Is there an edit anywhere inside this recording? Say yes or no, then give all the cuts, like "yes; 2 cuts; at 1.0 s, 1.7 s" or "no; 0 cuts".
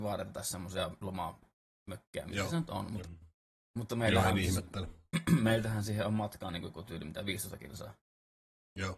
yes; 1 cut; at 3.0 s